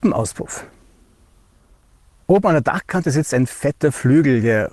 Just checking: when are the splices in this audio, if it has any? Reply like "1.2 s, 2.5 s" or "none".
none